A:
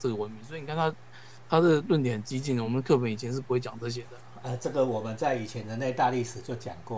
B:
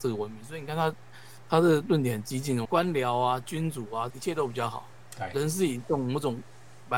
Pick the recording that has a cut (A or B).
B